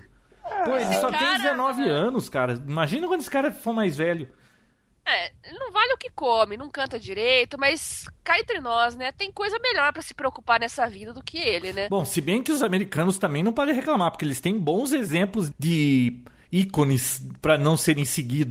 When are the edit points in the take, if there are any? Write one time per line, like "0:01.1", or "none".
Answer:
0:15.5